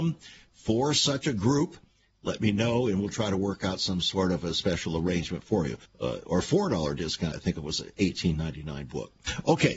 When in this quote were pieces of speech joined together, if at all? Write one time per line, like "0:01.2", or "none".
0:05.8
0:07.3